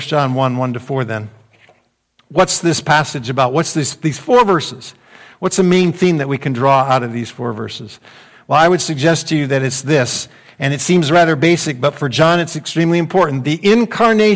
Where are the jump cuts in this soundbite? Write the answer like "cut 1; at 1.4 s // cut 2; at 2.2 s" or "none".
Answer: none